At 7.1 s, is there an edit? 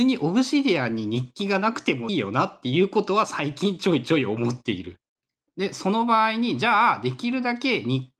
no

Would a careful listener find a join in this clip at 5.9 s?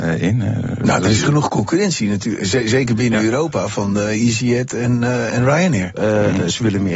yes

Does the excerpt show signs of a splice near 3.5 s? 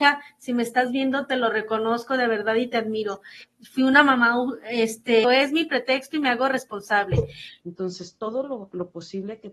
no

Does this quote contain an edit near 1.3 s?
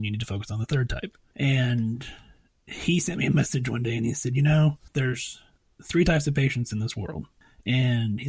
yes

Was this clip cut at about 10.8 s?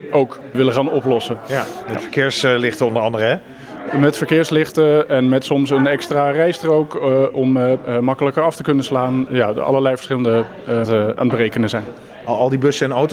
yes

